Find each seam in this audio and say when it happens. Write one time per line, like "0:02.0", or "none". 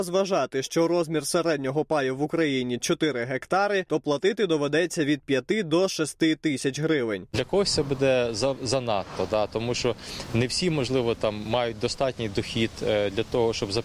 none